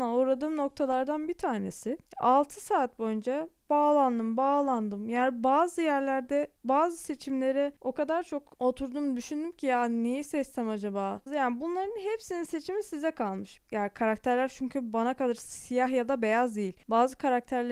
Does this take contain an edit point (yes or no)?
yes